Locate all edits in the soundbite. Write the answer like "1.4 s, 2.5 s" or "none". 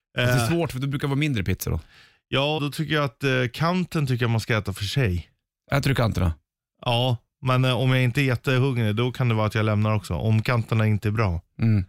2.6 s